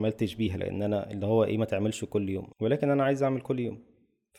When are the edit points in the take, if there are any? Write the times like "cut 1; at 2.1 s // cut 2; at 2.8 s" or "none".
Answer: cut 1; at 2.5 s